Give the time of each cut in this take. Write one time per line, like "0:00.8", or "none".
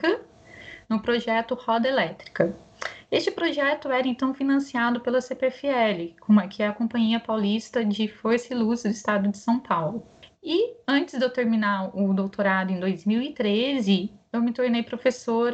0:10.3